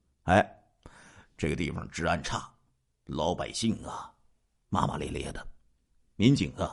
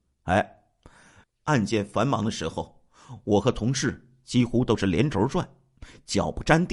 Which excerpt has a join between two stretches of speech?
second; 1 cut; at 1.2 s

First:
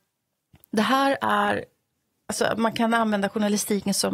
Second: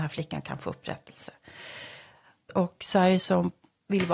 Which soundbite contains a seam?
second; 1 cut; at 2.5 s

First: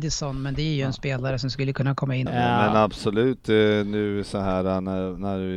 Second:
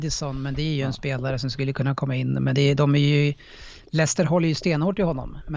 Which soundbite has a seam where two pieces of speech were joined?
first; 1 cut; at 2.3 s

